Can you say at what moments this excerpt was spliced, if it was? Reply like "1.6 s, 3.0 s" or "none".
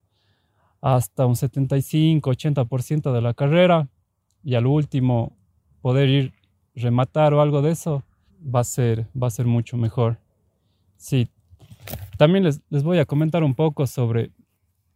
8.3 s